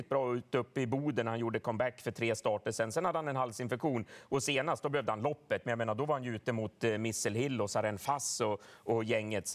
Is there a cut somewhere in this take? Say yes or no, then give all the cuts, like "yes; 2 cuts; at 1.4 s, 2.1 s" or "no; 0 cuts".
no; 0 cuts